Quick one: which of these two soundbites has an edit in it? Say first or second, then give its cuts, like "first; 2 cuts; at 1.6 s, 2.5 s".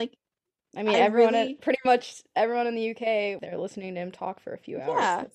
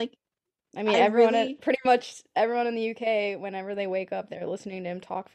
first; 1 cut; at 3.4 s